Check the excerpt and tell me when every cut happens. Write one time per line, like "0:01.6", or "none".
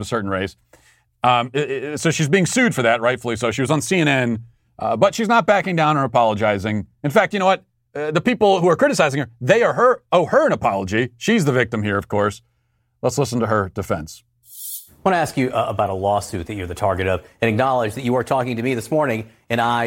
none